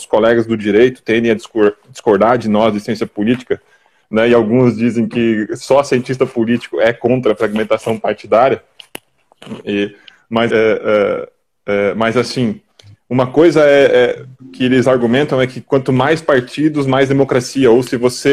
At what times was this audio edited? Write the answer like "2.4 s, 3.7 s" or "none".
10.5 s

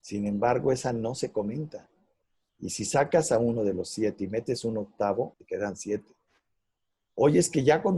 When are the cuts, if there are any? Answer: 2.5 s, 5.3 s

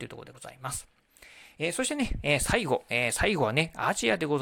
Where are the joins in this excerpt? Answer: none

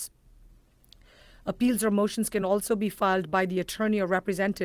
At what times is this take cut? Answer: none

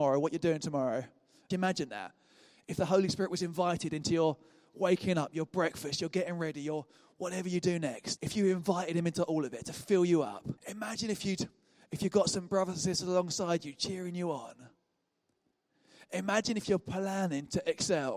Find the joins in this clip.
1.5 s, 8.2 s, 10.6 s

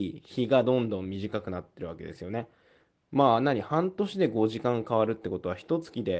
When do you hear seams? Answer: none

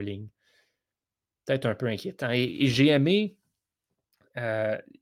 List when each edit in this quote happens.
none

